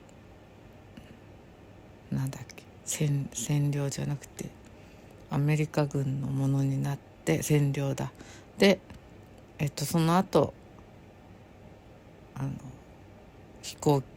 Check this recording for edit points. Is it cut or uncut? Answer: uncut